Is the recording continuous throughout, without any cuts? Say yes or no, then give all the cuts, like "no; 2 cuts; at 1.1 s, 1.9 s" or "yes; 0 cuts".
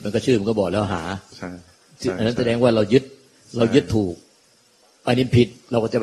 yes; 0 cuts